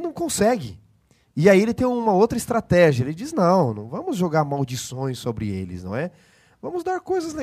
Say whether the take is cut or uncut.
uncut